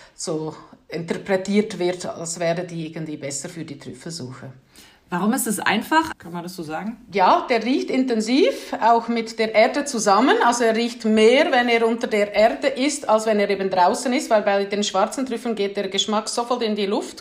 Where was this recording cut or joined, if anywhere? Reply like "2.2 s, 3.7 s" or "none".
6.1 s